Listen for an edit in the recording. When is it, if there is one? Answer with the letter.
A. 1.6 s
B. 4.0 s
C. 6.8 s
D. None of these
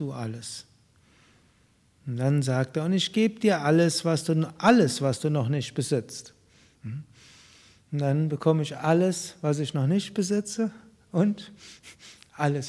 C